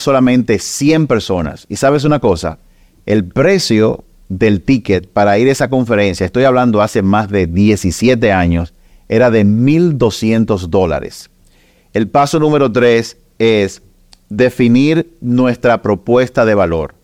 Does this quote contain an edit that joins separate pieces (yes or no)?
no